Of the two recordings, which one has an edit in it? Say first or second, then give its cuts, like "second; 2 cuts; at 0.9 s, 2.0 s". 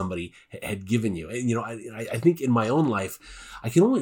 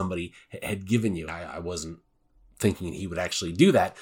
second; 1 cut; at 1.3 s